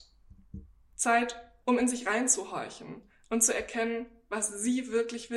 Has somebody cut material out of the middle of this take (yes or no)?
no